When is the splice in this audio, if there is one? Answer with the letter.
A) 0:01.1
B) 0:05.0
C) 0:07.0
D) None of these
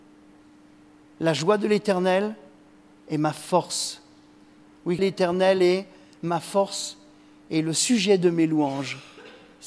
B